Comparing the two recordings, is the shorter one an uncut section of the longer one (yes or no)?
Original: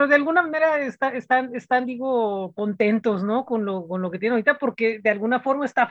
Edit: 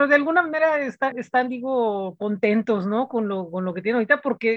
no